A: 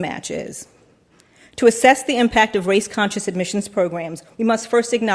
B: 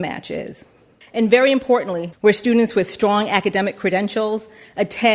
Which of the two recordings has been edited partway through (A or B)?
B